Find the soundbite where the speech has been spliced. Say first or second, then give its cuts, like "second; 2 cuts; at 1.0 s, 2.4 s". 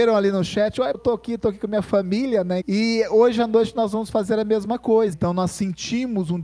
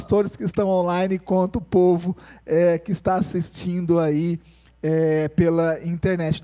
first; 3 cuts; at 0.9 s, 2.6 s, 5.1 s